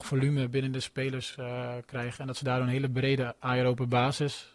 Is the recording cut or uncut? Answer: uncut